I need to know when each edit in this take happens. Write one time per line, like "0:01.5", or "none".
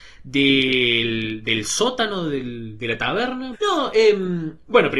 0:03.5